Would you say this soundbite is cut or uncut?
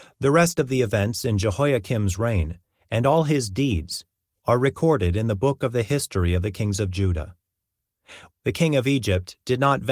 cut